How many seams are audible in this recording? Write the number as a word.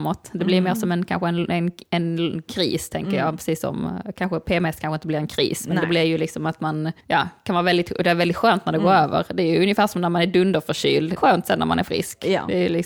two